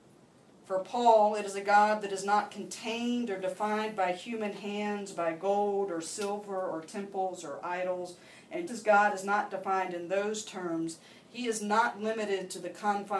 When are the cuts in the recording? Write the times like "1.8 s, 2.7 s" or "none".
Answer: 8.7 s